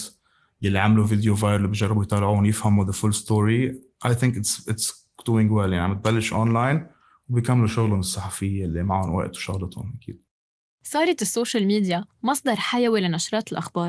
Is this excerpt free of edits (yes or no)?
yes